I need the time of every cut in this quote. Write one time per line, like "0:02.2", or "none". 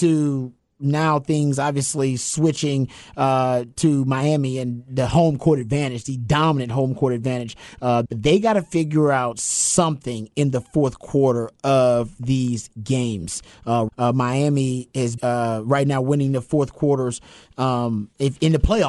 0:08.1
0:13.9
0:15.2

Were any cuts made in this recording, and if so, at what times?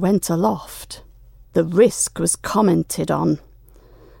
0:01.4

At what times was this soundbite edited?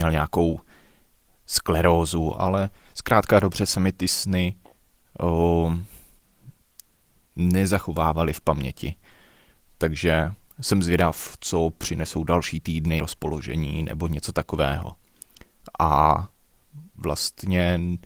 0:02.4
0:13.0

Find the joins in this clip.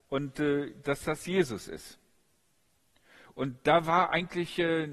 none

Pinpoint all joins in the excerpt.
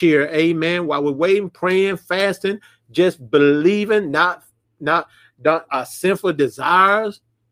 0:05.7

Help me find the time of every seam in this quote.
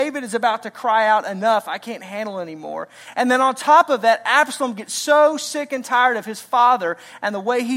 none

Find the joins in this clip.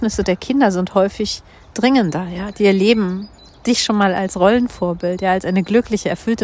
0:02.5

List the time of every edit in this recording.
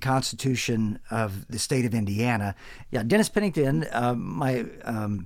0:02.9

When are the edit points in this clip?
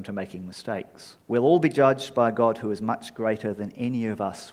0:01.2

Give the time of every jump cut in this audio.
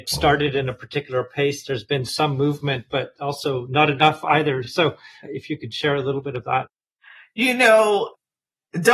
none

